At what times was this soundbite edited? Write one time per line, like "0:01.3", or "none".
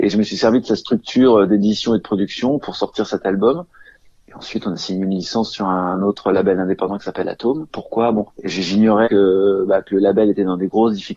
0:07.7
0:09.0